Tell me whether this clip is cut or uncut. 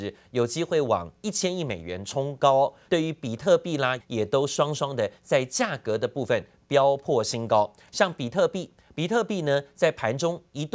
cut